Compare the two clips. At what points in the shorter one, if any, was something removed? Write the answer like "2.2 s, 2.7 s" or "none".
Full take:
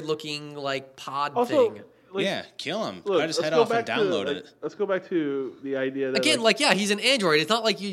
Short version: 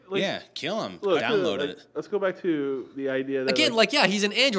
1.2 s